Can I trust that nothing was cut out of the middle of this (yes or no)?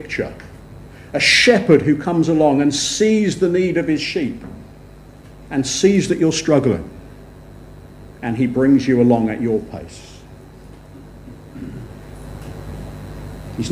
yes